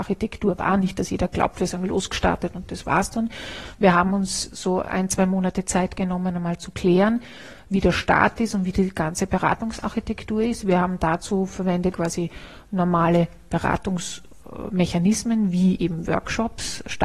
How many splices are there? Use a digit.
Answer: 1